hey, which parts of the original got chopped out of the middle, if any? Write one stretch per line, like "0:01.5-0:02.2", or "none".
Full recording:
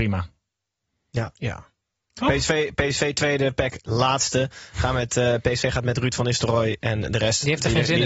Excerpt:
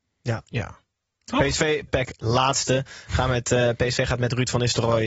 0:02.8-0:03.5